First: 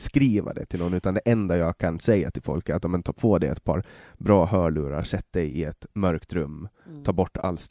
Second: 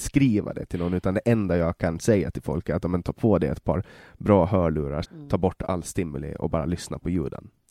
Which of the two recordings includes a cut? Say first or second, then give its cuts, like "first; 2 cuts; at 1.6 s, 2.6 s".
second; 1 cut; at 5.0 s